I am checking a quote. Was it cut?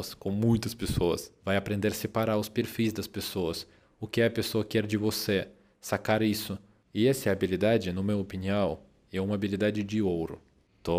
no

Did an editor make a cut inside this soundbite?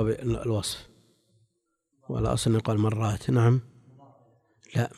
no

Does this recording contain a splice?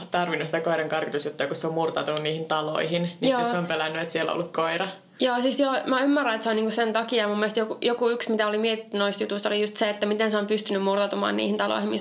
no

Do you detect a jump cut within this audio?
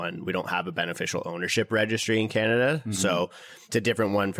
no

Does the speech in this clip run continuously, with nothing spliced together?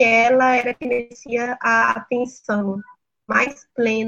yes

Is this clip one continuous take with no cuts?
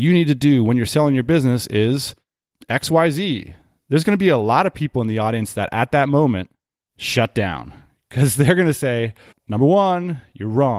no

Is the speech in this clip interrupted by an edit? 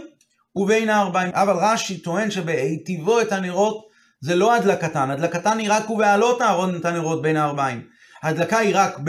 yes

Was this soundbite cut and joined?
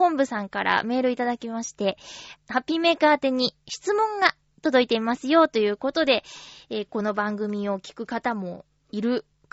yes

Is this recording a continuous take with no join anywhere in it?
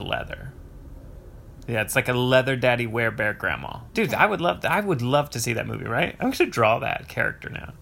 yes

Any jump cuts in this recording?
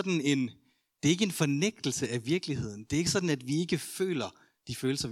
no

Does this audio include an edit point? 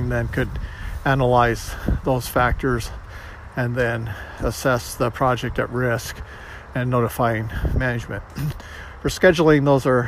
yes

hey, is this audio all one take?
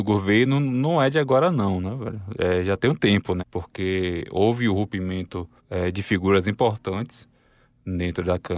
no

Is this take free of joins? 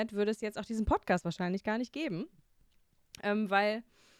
yes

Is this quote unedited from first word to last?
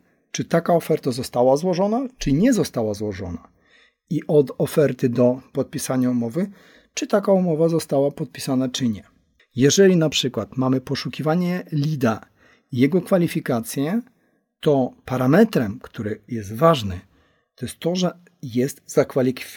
no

